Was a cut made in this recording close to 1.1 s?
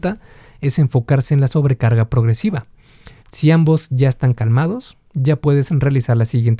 no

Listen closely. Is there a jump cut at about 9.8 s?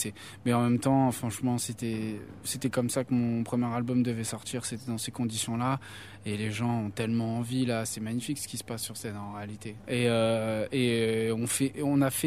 yes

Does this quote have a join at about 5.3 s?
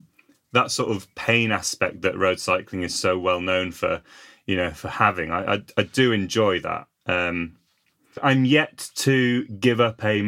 no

